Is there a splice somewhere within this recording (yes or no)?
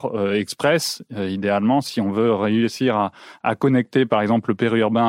no